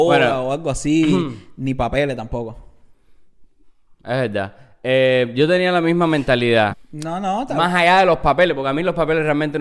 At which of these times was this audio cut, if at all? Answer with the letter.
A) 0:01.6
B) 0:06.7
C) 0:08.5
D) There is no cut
B